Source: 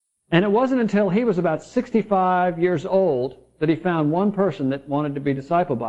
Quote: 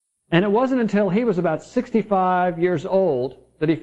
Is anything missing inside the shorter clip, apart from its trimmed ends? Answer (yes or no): no